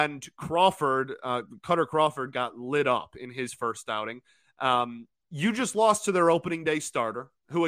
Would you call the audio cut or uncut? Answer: cut